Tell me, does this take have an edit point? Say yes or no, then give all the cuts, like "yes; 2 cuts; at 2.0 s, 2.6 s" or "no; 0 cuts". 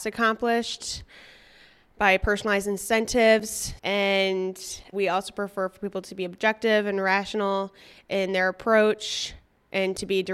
yes; 2 cuts; at 3.8 s, 4.9 s